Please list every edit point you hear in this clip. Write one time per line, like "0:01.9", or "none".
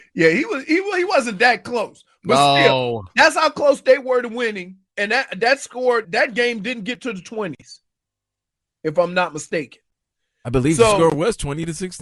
0:04.9
0:06.0

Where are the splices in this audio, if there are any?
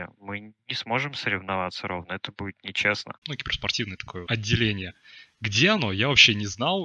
0:03.2
0:04.3

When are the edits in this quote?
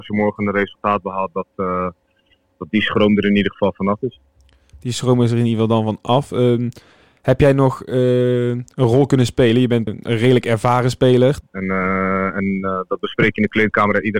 0:09.9
0:11.4

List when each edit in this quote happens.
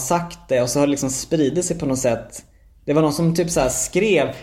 none

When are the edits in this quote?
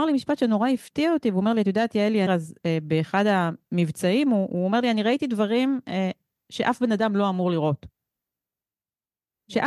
0:02.3

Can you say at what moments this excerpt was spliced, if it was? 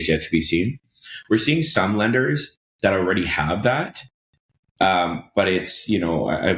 none

